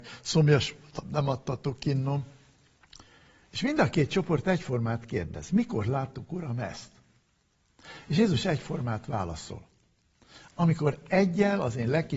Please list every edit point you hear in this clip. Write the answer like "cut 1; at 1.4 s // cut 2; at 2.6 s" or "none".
none